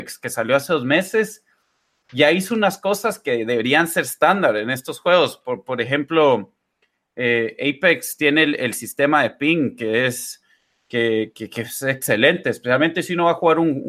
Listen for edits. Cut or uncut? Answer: uncut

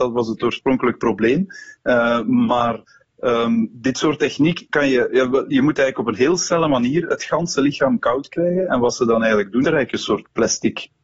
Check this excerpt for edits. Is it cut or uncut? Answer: cut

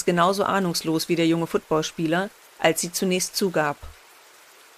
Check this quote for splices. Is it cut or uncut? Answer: cut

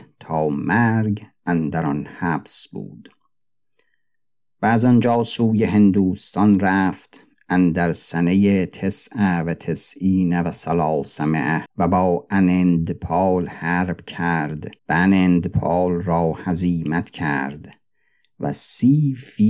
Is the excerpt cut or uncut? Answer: cut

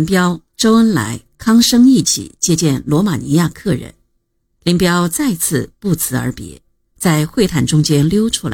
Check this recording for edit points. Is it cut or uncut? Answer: uncut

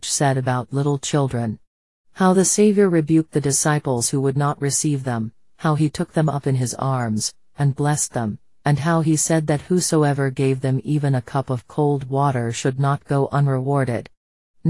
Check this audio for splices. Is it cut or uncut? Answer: uncut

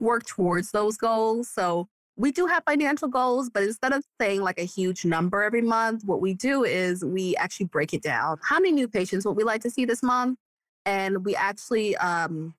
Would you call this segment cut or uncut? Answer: uncut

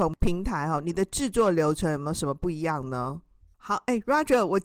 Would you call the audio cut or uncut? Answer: cut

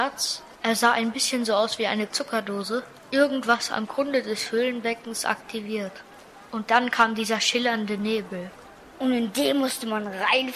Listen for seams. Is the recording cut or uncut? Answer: uncut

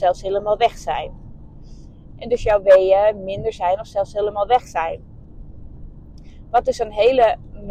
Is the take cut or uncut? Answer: cut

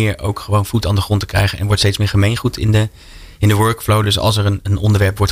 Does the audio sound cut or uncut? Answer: uncut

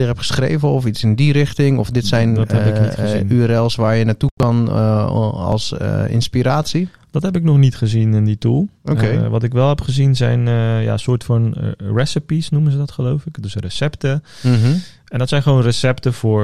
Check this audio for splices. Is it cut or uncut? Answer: uncut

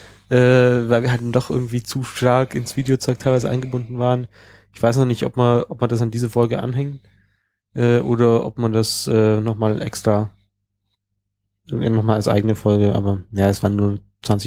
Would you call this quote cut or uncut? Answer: uncut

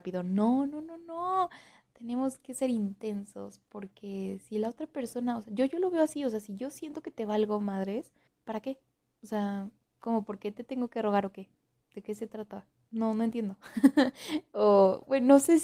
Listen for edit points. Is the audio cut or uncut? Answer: cut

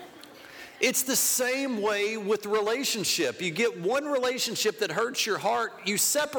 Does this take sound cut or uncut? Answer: uncut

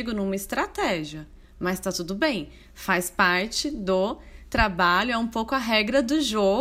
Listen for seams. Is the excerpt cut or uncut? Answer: uncut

